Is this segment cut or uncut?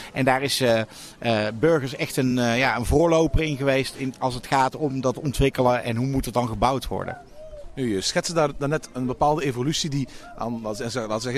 uncut